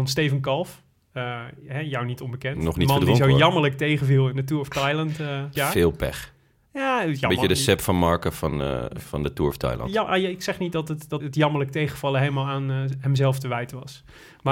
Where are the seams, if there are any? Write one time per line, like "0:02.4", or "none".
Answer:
0:05.5
0:11.2